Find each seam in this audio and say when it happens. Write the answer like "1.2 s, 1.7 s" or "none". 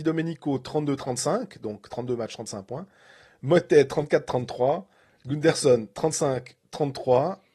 none

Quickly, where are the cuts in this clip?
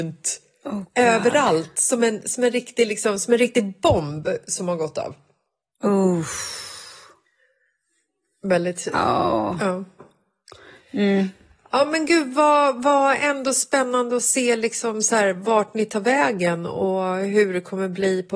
none

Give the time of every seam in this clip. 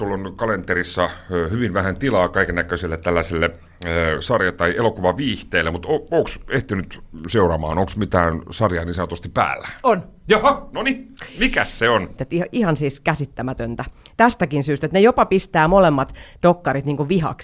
12.2 s

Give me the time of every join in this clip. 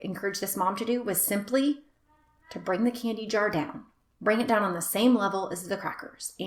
none

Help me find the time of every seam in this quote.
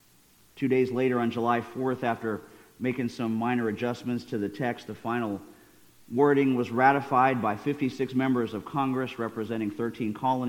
none

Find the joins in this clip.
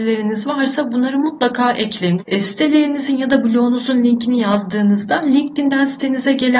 2.2 s

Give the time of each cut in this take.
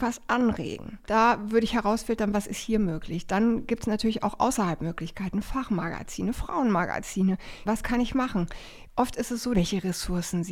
7.7 s, 9.5 s

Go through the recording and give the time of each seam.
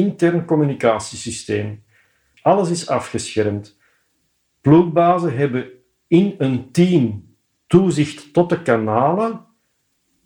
2.3 s

